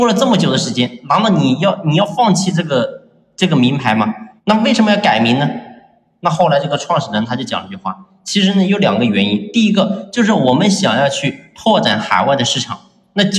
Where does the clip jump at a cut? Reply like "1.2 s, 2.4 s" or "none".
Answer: 4.4 s